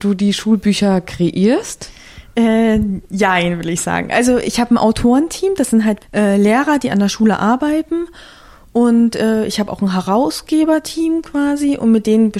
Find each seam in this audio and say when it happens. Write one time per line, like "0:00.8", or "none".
0:06.0